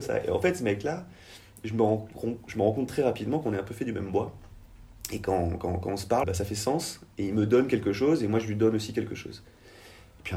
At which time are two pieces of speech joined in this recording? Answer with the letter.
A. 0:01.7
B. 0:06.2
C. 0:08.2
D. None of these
B